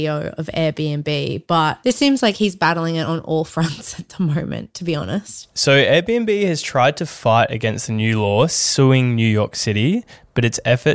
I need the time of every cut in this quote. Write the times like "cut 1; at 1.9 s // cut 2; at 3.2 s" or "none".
none